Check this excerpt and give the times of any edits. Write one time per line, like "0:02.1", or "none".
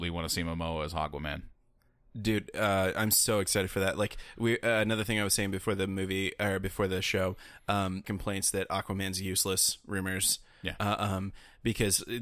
0:08.0